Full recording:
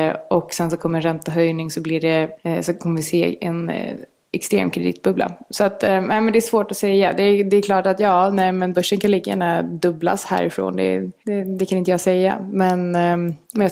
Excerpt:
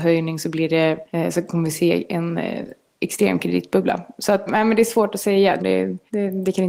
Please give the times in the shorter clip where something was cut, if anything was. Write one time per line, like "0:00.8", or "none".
0:04.5
0:05.6

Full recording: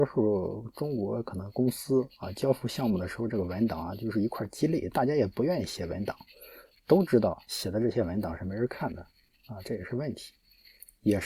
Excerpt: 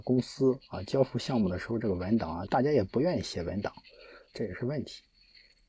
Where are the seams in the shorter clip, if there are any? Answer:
0:02.5
0:04.3

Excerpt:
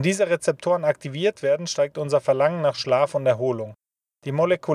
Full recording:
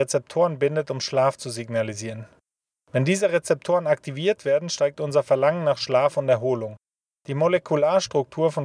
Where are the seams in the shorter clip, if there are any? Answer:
none

